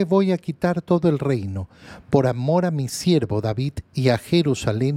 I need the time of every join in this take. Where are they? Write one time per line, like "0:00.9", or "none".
none